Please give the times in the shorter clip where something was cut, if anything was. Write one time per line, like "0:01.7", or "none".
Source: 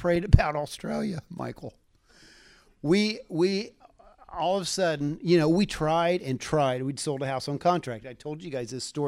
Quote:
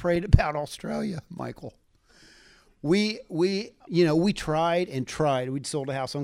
0:03.9